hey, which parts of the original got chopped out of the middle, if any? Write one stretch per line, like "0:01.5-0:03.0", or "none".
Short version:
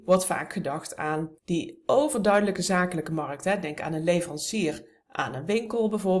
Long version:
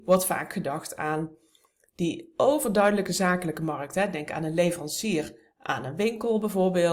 0:01.4-0:01.9